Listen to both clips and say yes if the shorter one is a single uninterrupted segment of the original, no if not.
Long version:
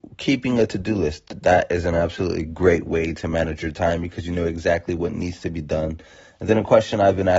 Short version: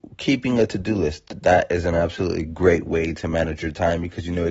yes